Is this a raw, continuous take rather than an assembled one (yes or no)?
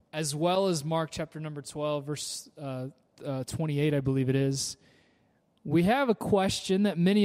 yes